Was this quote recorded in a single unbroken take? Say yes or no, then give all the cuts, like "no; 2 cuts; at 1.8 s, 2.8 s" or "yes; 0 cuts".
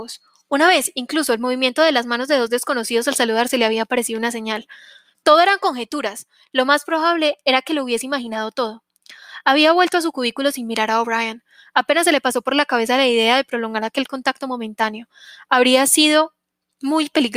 yes; 0 cuts